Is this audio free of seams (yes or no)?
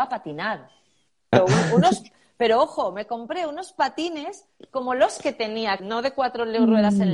no